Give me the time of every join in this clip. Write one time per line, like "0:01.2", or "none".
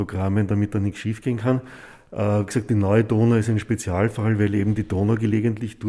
none